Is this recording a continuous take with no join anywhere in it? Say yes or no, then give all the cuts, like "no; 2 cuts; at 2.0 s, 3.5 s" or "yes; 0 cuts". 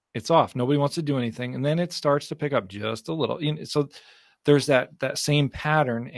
yes; 0 cuts